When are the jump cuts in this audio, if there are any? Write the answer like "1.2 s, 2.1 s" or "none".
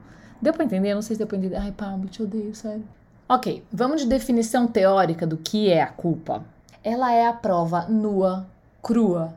6.7 s